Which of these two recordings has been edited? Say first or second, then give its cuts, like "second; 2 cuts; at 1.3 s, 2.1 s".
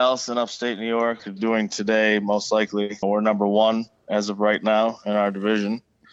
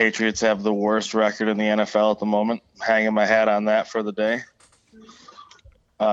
first; 2 cuts; at 1.2 s, 3.0 s